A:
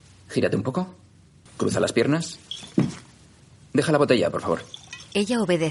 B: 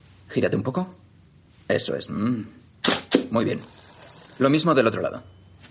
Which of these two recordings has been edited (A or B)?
A